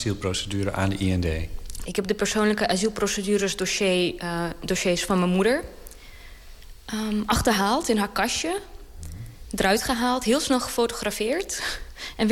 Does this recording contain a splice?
yes; 1 cut; at 1.8 s

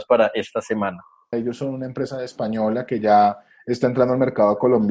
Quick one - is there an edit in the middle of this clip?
yes; 1 cut; at 1.3 s

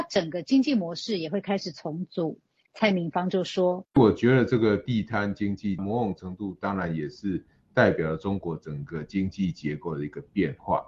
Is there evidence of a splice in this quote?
yes; 1 cut; at 2.6 s

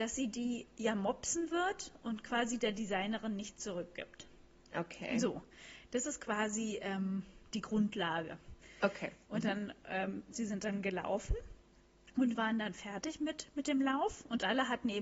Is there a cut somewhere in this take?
yes; 2 cuts; at 9.3 s, 10.3 s

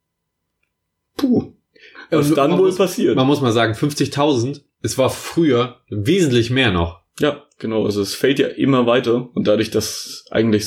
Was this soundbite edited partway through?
no; 0 cuts

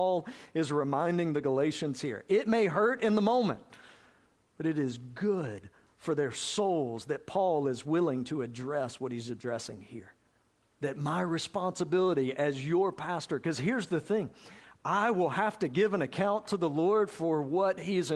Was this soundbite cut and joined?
yes; 1 cut; at 10.7 s

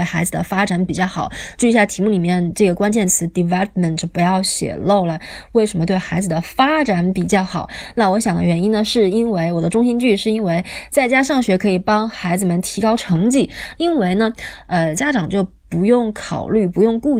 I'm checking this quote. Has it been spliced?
yes; 2 cuts; at 13.7 s, 14.9 s

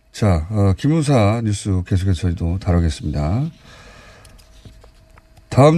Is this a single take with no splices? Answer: yes; 0 cuts

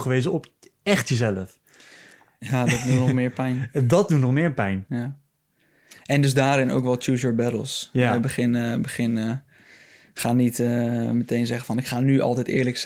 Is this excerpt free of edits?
yes; 0 cuts

